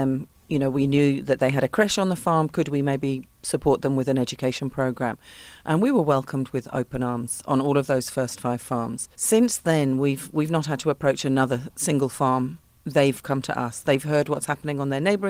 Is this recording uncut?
no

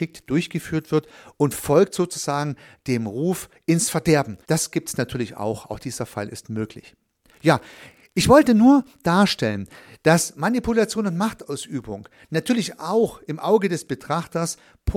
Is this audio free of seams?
no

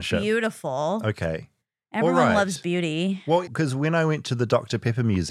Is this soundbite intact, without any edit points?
no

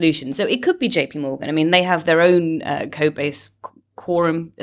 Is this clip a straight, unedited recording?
yes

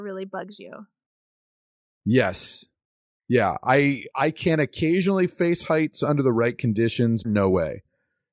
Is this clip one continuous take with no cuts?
no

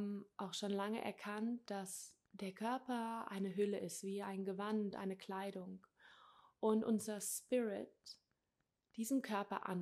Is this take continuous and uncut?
no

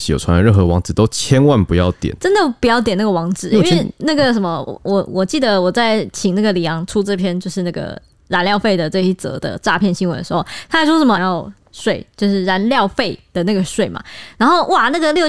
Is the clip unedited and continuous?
no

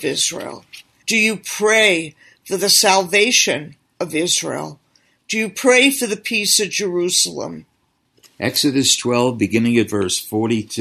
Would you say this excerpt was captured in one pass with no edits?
no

